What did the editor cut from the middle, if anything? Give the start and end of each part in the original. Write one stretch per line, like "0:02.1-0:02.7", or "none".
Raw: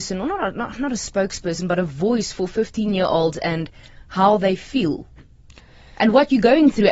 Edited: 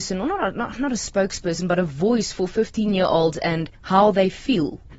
0:03.7-0:04.0